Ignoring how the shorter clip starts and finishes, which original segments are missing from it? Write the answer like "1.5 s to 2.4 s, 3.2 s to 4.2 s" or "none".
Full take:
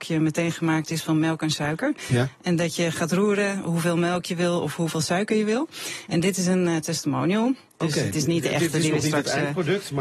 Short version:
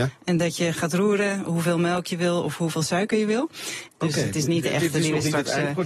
6.1 s to 7.7 s